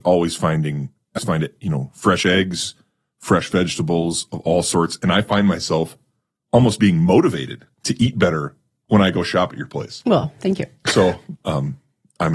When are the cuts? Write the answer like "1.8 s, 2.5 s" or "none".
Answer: 1.2 s

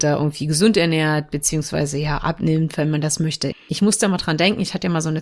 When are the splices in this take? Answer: 3.5 s

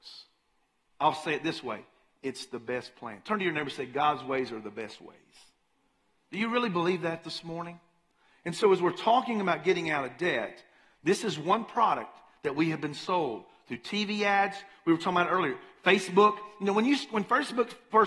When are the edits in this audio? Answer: none

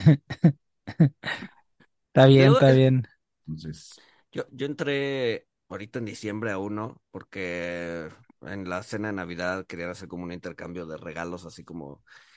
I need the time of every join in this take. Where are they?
3.4 s, 4.5 s

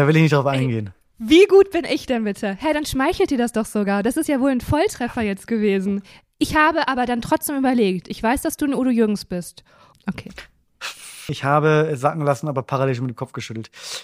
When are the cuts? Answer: 9.9 s, 11.3 s

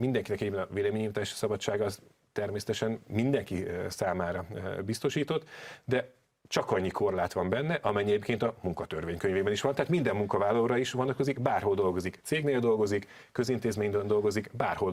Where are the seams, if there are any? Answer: none

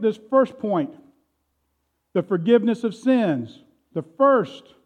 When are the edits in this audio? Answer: 3.9 s

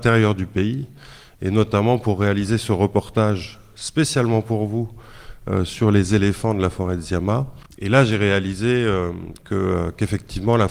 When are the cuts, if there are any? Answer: none

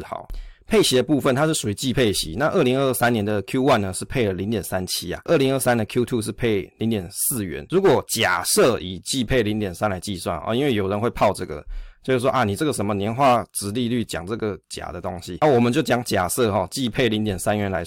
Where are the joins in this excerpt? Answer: none

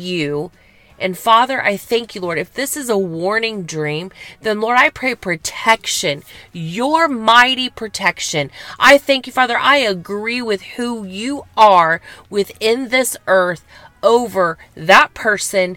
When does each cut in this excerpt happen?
none

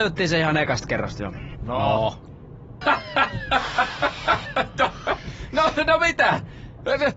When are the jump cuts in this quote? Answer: 1.5 s, 2.8 s, 4.5 s

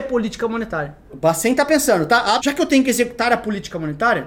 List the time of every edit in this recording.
1.1 s, 2.4 s

